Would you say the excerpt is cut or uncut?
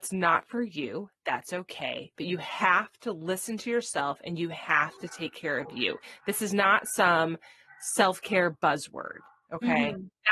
uncut